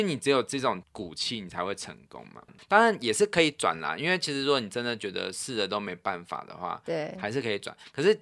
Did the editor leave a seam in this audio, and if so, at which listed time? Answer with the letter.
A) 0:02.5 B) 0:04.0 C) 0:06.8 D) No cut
A